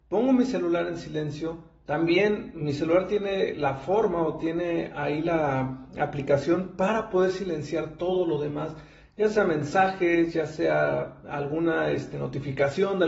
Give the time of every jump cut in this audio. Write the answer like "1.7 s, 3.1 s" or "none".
none

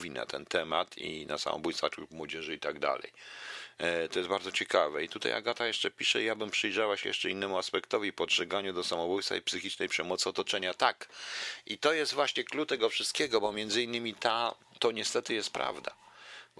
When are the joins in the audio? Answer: 14.8 s

